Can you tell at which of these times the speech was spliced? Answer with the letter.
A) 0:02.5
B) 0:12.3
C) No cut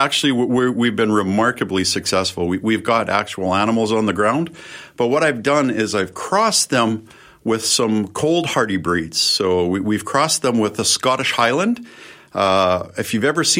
C